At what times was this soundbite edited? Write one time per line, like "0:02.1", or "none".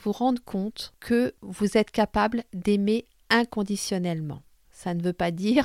0:04.7